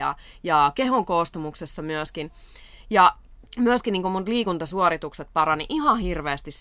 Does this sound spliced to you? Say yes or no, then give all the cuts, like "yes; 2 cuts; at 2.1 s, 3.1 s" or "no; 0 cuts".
yes; 1 cut; at 3.5 s